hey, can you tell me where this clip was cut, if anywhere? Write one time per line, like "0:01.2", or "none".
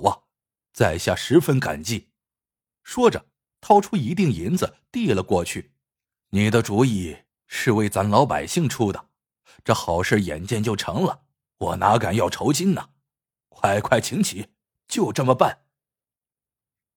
0:06.2
0:13.4